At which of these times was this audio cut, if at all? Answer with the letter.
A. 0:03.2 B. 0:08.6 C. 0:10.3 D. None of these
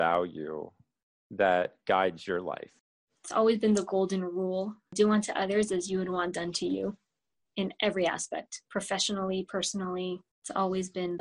D